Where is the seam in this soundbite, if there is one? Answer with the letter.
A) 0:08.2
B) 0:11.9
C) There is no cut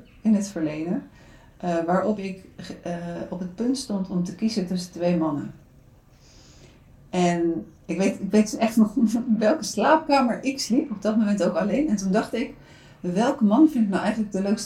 C